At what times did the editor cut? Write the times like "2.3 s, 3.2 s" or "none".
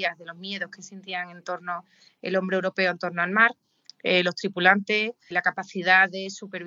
3.9 s, 5.3 s